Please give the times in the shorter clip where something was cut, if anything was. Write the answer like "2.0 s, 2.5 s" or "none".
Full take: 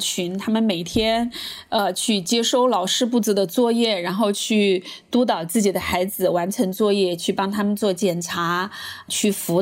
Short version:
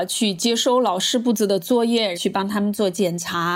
2.1 s